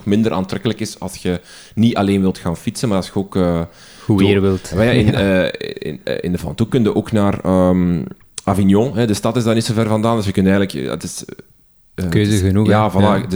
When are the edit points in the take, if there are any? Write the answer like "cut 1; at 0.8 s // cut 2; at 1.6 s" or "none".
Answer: none